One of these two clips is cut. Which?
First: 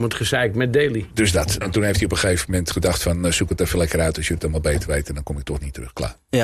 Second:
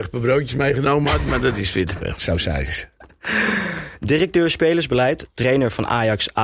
first; 1 cut; at 1.6 s

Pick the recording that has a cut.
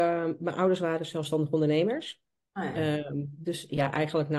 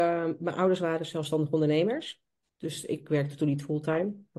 second; 1 cut; at 2.4 s

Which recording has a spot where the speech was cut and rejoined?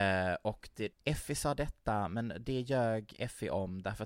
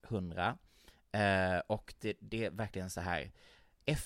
first; 1 cut; at 0.9 s

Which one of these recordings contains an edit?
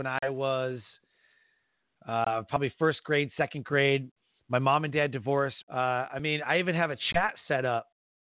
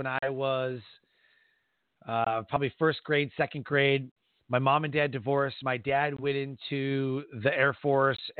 first; 1 cut; at 5.6 s

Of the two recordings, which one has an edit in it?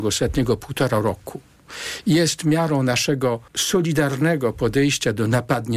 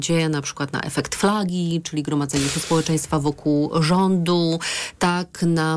first; 1 cut; at 3.5 s

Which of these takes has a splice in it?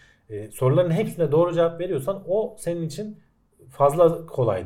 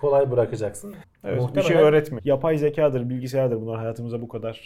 second; 2 cuts; at 1.0 s, 2.2 s

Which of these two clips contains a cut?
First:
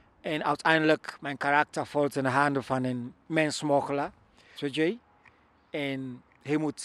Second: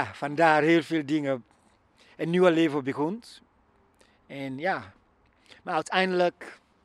first; 1 cut; at 4.6 s

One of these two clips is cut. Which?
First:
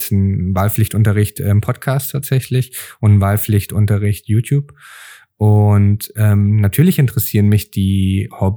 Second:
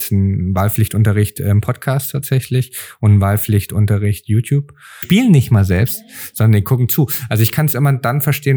second; 1 cut; at 5.0 s

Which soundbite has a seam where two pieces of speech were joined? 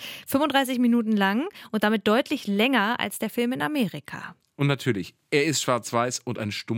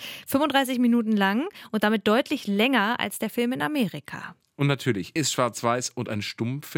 second; 1 cut; at 5.2 s

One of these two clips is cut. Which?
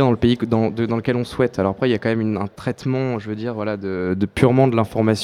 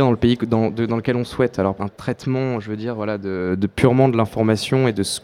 second; 1 cut; at 1.8 s

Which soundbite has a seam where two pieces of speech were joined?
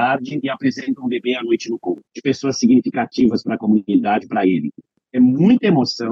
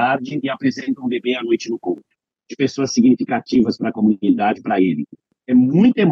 first; 1 cut; at 2.1 s

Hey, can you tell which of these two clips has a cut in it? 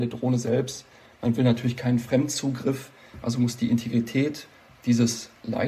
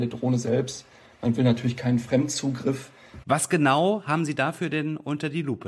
second; 1 cut; at 3.2 s

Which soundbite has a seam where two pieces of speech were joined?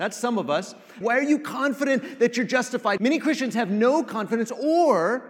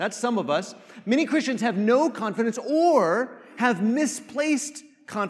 first; 2 cuts; at 1.0 s, 3.0 s

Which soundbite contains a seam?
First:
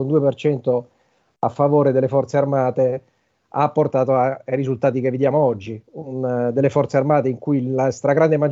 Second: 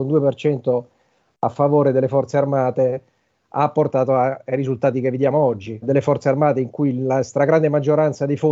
second; 1 cut; at 5.8 s

